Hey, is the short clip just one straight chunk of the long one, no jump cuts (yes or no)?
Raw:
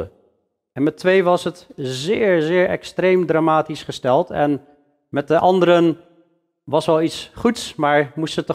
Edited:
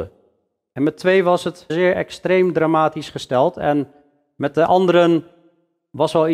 no